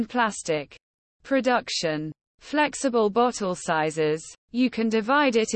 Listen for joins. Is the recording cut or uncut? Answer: cut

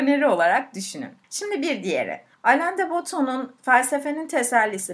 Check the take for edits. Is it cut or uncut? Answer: uncut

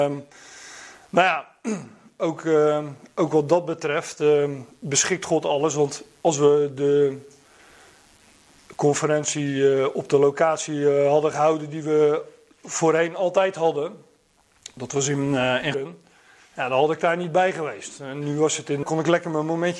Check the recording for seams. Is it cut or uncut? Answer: cut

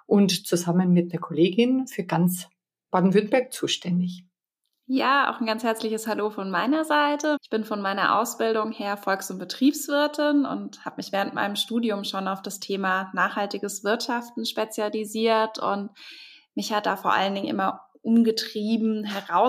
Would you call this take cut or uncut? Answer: cut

